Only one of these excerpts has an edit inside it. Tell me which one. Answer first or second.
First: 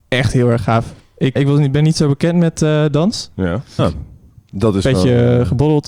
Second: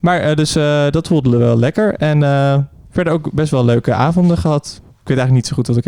first